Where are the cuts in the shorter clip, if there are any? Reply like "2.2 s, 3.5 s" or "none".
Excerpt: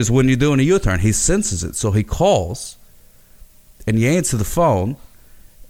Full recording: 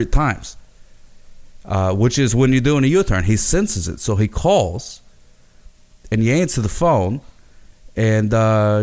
none